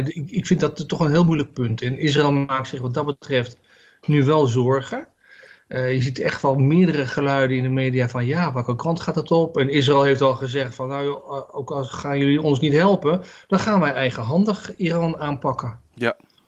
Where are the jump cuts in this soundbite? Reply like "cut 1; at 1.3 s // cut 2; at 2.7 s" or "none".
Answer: none